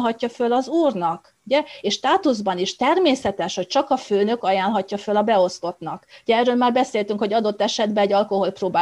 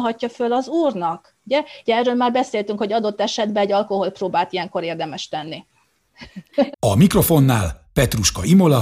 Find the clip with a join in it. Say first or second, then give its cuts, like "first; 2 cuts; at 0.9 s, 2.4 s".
second; 2 cuts; at 1.8 s, 6.7 s